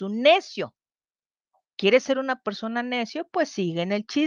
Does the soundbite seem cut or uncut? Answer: uncut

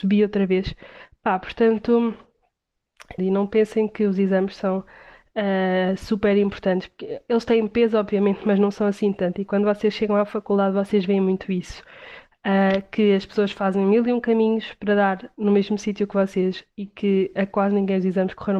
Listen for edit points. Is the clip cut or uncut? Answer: cut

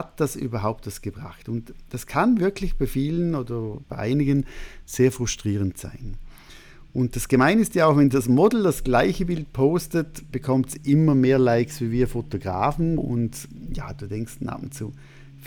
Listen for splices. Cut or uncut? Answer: cut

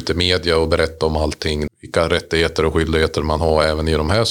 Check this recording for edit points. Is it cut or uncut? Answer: cut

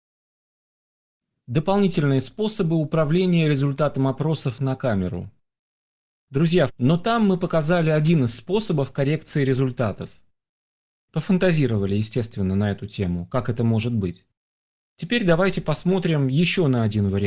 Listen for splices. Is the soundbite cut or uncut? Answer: cut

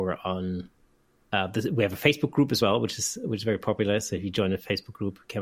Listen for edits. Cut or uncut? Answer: uncut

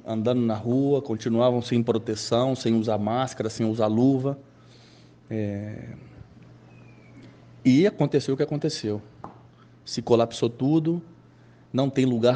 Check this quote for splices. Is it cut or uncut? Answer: uncut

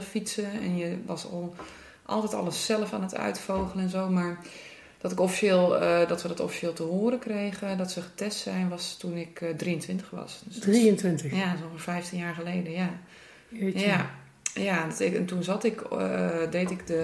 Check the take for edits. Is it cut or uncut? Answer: uncut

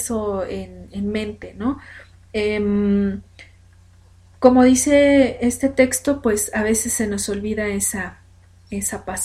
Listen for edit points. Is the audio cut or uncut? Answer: uncut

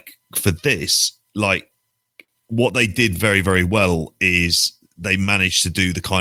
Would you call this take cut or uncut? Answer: uncut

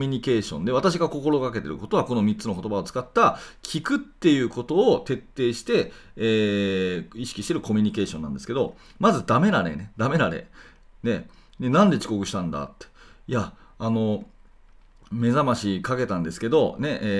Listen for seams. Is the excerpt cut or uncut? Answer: cut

